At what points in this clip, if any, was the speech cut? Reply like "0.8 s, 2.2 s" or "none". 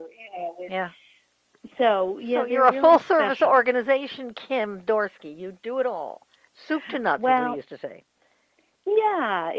none